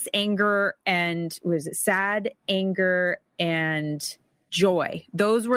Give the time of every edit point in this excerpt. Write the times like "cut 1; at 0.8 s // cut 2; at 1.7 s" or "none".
none